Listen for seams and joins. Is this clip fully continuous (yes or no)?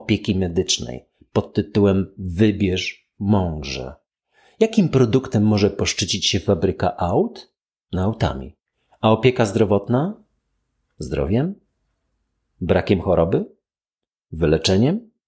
yes